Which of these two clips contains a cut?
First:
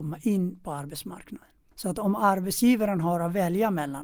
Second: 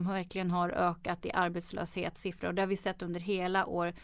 first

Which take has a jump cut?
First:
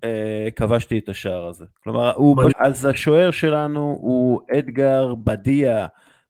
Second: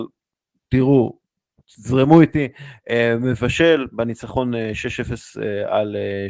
first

